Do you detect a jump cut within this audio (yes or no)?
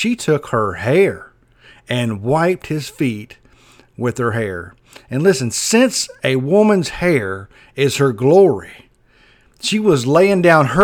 no